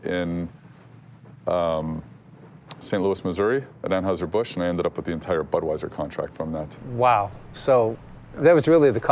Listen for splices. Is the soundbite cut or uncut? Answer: uncut